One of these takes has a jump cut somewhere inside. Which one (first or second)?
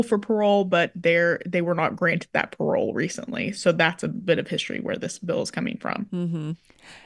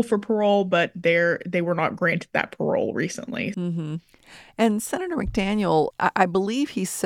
second